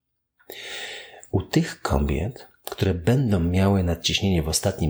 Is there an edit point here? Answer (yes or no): no